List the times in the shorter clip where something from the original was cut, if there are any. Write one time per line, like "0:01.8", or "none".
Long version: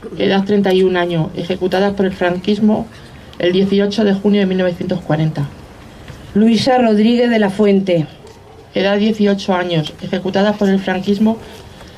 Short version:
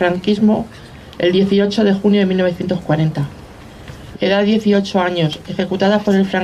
0:04.1